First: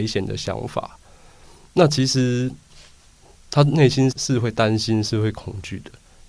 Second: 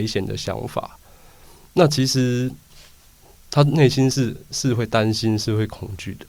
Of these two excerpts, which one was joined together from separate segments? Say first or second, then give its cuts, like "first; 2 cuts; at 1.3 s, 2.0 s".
first; 1 cut; at 4.1 s